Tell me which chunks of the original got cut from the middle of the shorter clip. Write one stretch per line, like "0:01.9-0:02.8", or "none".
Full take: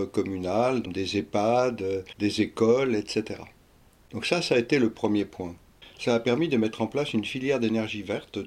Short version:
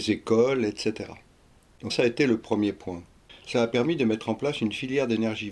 0:04.2-0:04.4